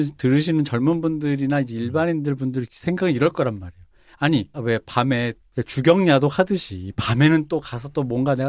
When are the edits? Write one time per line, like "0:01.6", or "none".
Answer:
0:04.5

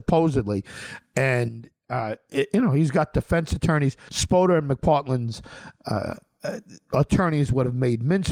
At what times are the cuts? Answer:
0:04.1

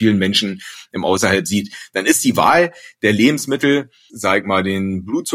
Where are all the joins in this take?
0:04.1

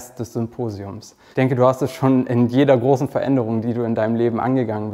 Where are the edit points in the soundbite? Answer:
0:01.3

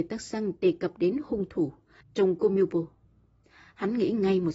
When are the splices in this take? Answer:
0:02.0

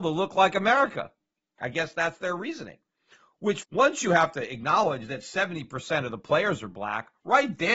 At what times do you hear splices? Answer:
0:01.6
0:03.6

